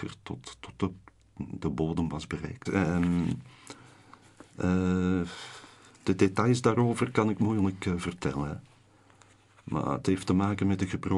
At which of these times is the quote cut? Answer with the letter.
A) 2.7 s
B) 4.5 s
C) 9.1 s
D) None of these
A